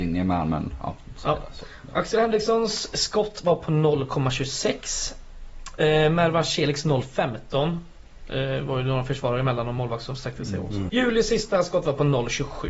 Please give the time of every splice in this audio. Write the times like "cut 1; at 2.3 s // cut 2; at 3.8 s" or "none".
cut 1; at 10.9 s